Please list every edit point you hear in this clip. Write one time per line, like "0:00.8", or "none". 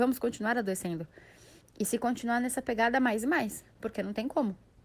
none